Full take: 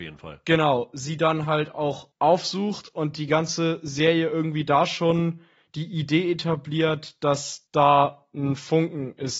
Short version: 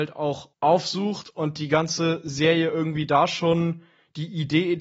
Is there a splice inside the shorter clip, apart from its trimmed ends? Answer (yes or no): no